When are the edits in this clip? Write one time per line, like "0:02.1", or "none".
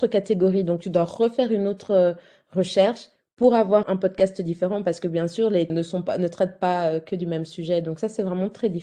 0:03.8
0:05.7